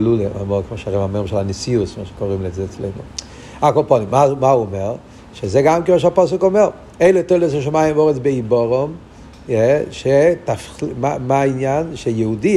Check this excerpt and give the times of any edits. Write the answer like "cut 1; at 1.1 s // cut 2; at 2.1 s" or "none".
none

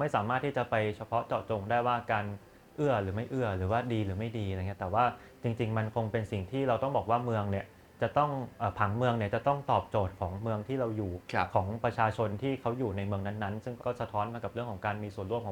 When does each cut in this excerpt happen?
cut 1; at 13.8 s

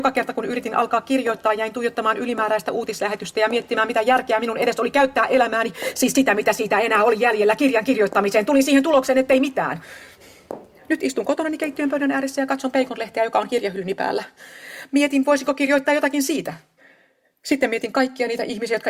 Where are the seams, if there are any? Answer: none

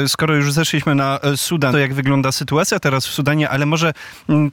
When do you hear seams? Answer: cut 1; at 1.7 s

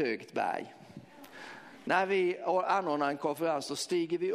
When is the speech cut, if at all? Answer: cut 1; at 1.8 s

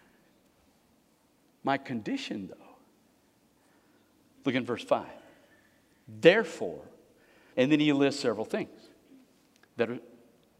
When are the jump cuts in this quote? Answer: cut 1; at 7.5 s

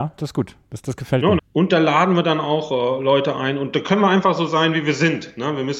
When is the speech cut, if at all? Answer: cut 1; at 1.4 s

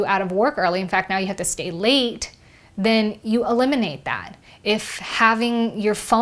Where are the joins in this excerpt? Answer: none

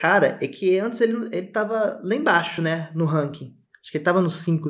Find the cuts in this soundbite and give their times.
none

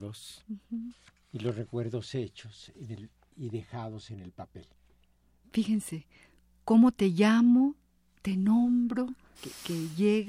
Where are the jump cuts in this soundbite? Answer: cut 1; at 9.3 s

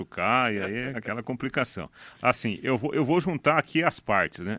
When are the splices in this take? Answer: cut 1; at 0.9 s

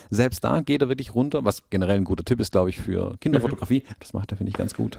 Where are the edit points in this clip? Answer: cut 1; at 4.0 s

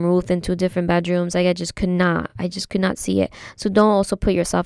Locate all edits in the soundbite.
none

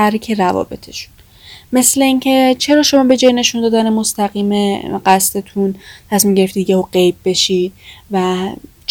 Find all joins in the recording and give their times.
none

